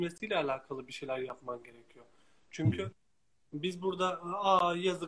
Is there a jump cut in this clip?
no; 0 cuts

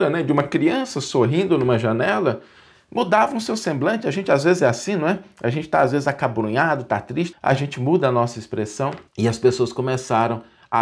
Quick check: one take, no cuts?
no; 2 cuts; at 7.3 s, 9.1 s

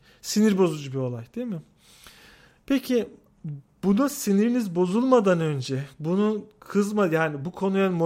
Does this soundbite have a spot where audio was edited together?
no; 0 cuts

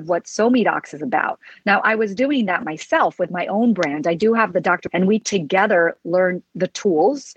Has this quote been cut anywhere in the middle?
yes; 1 cut; at 4.9 s

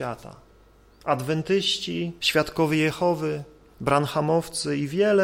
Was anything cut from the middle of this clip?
yes; 1 cut; at 2.2 s

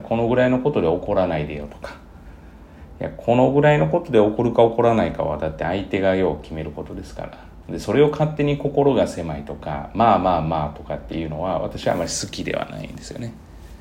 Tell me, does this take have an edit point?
no; 0 cuts

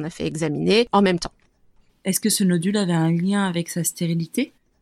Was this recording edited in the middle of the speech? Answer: no; 0 cuts

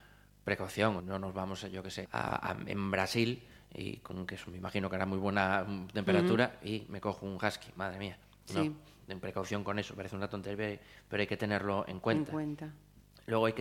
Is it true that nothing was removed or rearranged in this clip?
no; 2 cuts; at 1.0 s, 2.0 s

